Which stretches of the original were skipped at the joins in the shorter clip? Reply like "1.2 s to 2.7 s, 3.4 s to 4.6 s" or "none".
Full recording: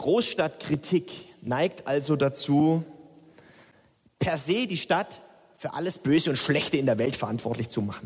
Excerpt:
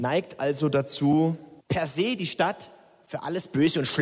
3.1 s to 4.1 s